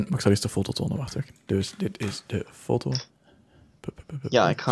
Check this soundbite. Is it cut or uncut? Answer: uncut